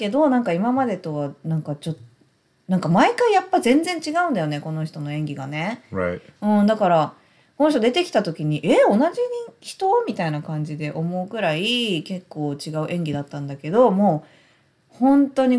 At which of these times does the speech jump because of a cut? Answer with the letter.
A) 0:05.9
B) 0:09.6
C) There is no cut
C